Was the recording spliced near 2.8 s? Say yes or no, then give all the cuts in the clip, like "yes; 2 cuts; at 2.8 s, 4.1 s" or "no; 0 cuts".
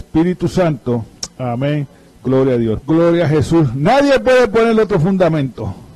yes; 1 cut; at 2.8 s